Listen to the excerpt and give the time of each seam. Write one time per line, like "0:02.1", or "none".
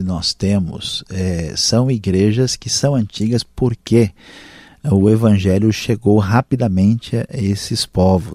none